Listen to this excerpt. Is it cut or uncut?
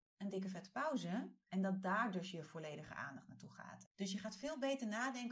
cut